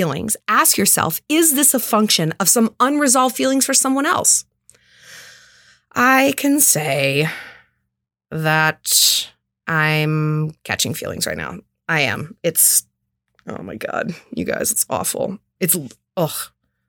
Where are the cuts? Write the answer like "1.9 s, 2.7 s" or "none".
none